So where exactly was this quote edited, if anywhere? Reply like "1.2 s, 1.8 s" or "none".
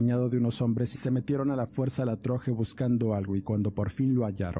0.9 s